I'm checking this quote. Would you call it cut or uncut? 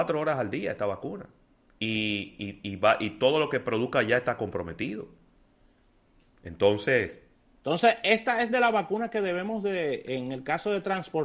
uncut